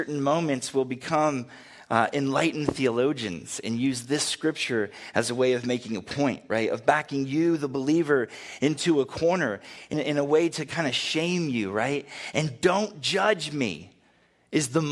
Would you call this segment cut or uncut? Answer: cut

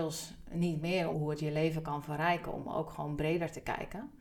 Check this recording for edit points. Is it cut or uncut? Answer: cut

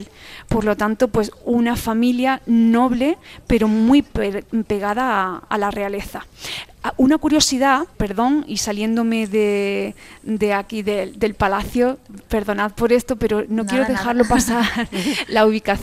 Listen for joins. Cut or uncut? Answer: cut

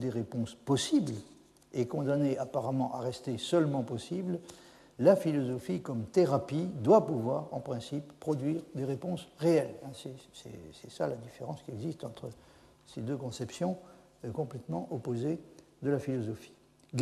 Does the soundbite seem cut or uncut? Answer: uncut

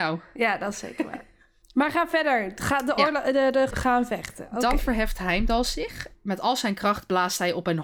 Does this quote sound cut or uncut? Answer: cut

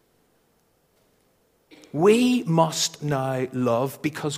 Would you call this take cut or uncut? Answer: uncut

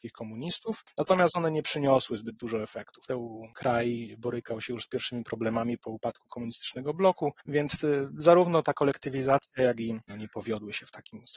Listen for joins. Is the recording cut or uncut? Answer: cut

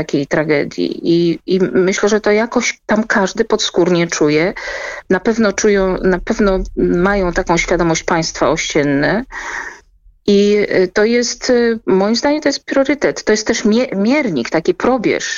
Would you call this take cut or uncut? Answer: uncut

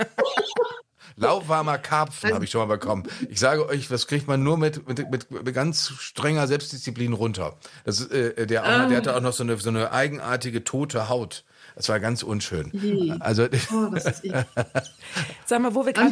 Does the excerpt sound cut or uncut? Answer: uncut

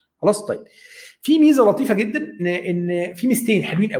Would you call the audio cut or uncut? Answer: cut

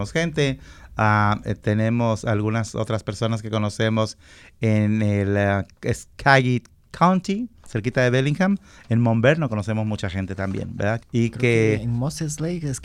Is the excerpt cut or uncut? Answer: cut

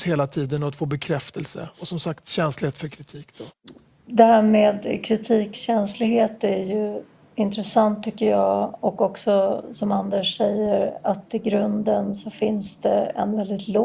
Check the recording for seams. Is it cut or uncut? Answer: uncut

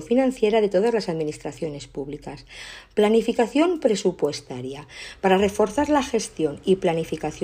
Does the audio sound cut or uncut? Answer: uncut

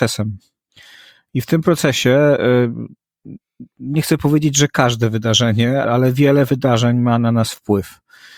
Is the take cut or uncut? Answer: cut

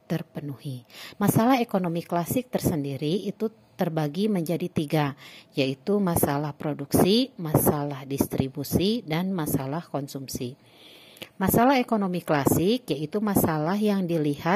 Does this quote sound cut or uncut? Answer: cut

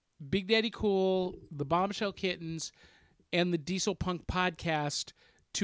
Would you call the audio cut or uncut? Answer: uncut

